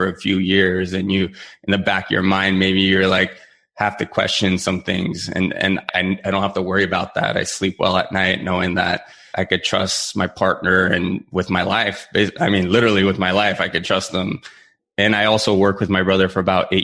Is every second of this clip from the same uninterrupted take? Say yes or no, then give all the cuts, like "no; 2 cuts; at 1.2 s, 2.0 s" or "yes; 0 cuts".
yes; 0 cuts